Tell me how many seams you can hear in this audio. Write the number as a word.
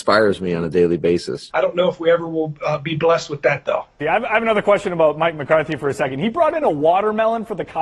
two